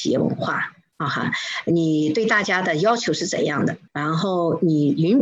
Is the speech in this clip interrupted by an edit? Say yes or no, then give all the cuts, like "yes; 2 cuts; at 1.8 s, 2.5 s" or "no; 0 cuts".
yes; 1 cut; at 3.9 s